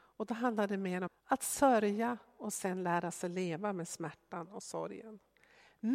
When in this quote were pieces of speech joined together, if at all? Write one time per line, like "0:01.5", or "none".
0:01.1